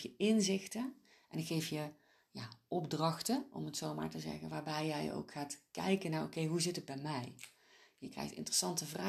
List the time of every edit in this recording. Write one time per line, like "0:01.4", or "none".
none